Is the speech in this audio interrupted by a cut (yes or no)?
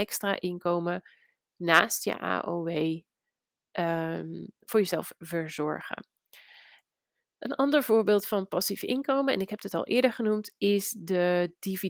no